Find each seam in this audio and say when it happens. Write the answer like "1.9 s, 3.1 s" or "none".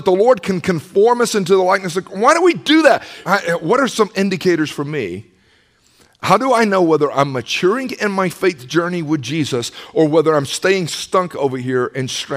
3.2 s